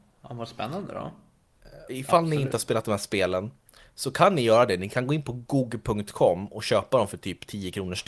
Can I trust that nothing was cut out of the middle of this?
no; 1 cut; at 1.9 s

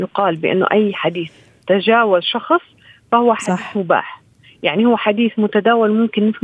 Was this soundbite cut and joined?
no; 0 cuts

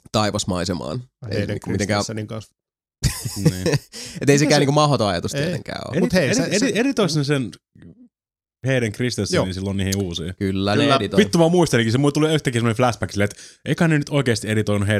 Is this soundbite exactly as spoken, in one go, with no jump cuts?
yes; 0 cuts

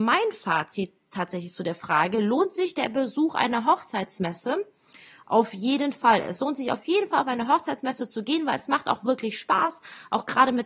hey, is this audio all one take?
yes; 0 cuts

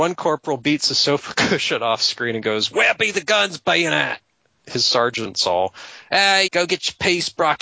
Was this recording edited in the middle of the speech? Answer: yes; 2 cuts; at 4.6 s, 6.5 s

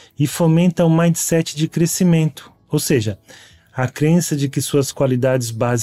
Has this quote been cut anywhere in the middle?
no; 0 cuts

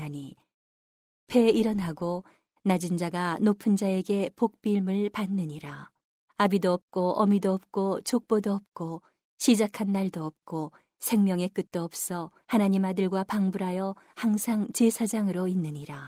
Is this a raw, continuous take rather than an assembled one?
no; 2 cuts; at 6.3 s, 12.4 s

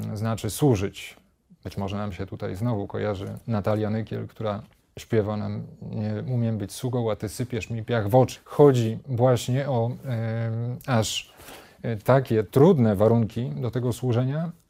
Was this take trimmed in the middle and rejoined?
yes; 1 cut; at 8.4 s

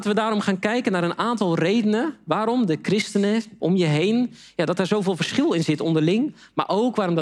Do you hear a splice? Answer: yes; 1 cut; at 3.6 s

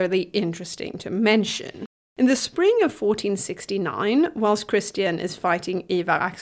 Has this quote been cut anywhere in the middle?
no; 0 cuts

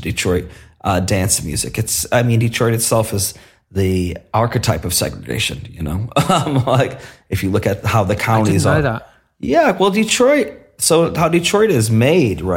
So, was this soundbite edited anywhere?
no; 0 cuts

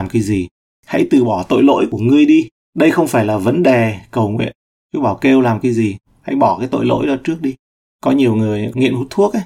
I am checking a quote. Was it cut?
no; 0 cuts

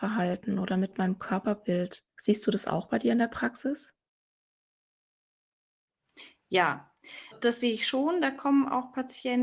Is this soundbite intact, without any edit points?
no; 2 cuts; at 2.1 s, 7.3 s

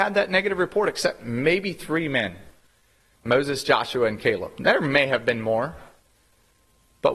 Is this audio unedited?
yes; 0 cuts

